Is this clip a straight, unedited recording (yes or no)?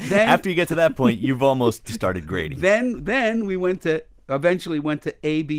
yes